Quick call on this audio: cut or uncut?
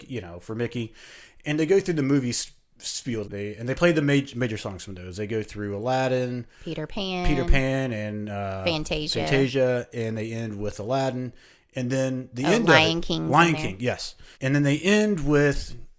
cut